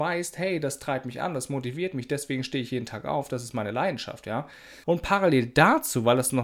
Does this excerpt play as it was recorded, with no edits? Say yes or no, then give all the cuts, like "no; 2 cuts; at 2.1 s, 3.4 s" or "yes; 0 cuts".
no; 1 cut; at 4.8 s